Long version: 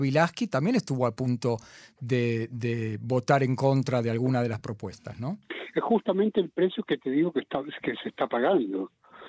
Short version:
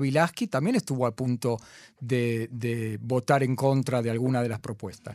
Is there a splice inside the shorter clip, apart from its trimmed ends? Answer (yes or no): no